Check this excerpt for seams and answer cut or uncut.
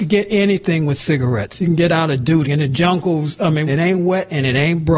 cut